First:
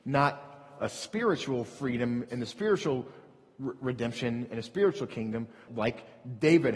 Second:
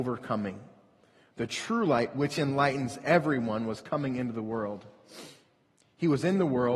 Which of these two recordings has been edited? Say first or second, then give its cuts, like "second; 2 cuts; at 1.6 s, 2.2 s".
first; 1 cut; at 5.7 s